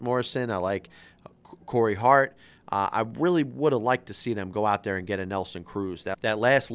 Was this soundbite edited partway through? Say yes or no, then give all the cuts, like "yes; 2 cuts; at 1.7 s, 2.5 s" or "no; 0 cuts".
no; 0 cuts